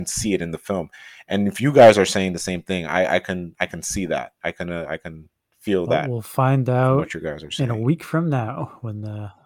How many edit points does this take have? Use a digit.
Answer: 0